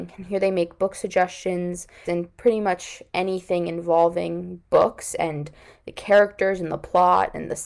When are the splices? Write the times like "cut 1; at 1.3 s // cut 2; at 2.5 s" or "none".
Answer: cut 1; at 2.0 s